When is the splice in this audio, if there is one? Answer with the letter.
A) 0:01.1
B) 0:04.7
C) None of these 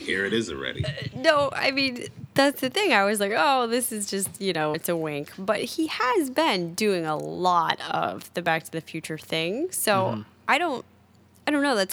B